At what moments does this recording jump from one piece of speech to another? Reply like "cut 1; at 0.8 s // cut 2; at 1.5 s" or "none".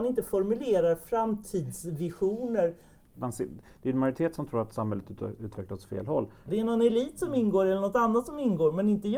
cut 1; at 3.1 s // cut 2; at 6.5 s